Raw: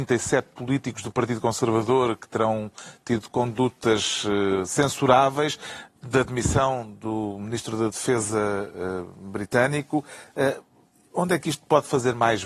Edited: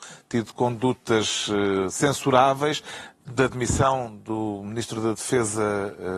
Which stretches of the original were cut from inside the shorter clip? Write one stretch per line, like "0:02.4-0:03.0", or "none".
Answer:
none